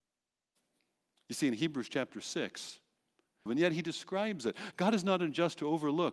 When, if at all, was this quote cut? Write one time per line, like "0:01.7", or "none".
0:03.5

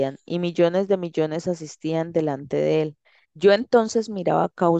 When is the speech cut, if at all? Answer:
0:03.2

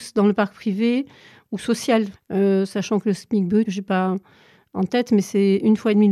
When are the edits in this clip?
0:02.1
0:03.7

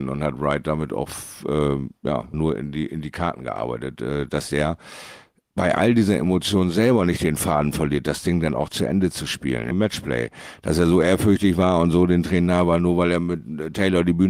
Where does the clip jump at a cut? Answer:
0:02.3
0:09.7

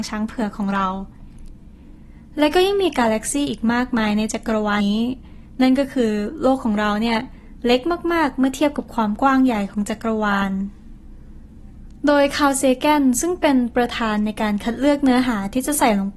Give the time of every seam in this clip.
0:04.8

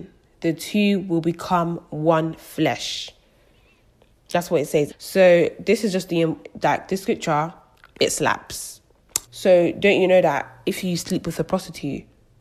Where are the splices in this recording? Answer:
0:04.9
0:09.2

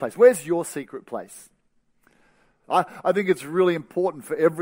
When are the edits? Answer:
0:02.6

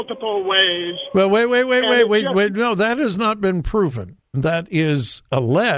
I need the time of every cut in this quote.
0:04.3

